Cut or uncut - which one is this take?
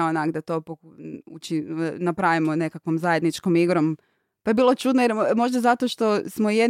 uncut